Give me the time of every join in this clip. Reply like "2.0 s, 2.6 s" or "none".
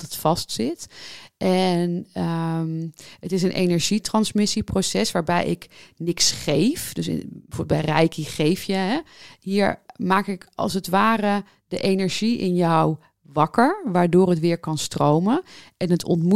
none